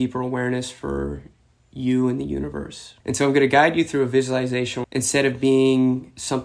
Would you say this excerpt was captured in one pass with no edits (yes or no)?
no